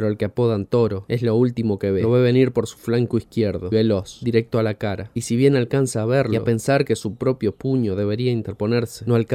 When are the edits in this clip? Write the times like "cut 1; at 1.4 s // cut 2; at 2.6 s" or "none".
cut 1; at 3.7 s